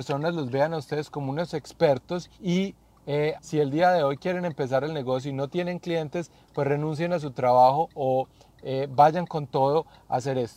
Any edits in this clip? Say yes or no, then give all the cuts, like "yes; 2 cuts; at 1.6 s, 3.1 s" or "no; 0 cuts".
yes; 2 cuts; at 2.3 s, 3.4 s